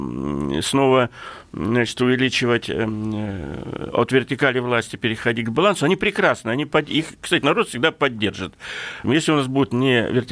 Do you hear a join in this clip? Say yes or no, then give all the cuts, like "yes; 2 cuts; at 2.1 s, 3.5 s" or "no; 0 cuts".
yes; 1 cut; at 9.0 s